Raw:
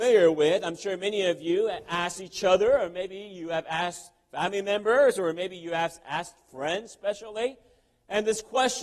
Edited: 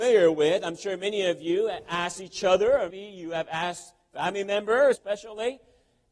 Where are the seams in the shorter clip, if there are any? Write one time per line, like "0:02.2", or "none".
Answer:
0:02.9
0:05.0